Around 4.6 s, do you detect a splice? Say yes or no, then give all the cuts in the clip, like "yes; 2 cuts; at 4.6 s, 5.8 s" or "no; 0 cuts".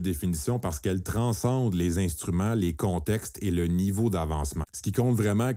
yes; 1 cut; at 4.6 s